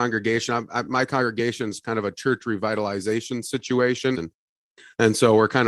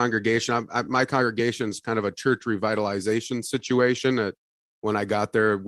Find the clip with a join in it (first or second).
first